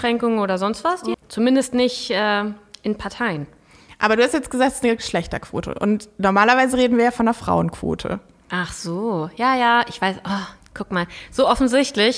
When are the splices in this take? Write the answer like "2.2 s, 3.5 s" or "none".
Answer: 1.1 s